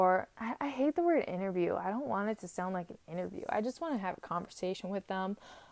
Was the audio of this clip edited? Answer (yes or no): no